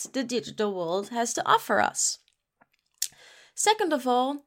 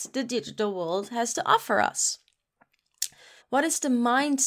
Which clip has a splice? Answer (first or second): second